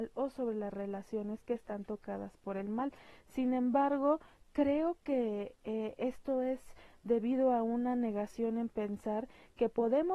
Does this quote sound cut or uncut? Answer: uncut